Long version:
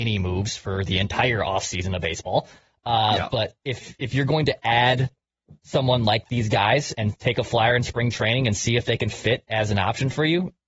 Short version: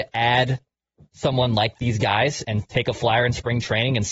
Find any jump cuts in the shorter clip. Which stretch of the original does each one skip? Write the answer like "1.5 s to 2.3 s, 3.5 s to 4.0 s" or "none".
none